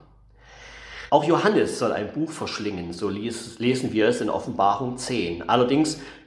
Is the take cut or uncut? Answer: cut